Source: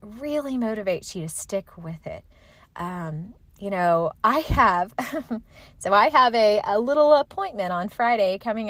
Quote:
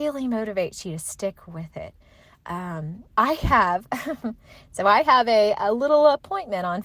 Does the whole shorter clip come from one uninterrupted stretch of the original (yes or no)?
no